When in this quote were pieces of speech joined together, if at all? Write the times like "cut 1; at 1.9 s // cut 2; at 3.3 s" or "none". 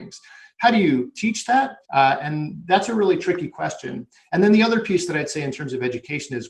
cut 1; at 1.8 s